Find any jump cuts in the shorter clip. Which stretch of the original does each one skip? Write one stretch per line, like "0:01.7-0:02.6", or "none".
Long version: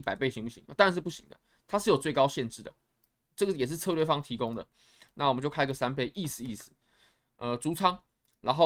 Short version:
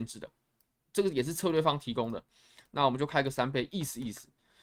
none